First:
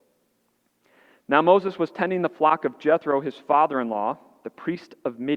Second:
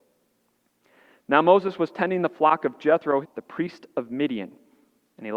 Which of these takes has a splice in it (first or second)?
second